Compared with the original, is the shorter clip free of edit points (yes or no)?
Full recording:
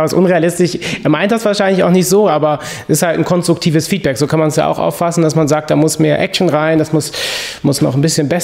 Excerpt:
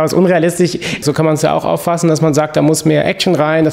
no